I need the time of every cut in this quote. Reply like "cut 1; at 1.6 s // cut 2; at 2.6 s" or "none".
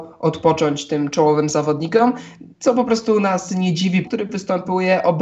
cut 1; at 2.5 s // cut 2; at 4.0 s